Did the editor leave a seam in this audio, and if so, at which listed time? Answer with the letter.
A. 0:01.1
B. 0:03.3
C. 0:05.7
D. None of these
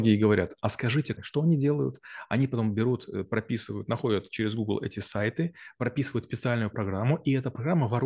A